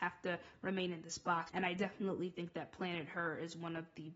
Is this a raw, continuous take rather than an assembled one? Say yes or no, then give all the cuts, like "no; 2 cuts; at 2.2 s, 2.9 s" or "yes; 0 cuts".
no; 1 cut; at 1.5 s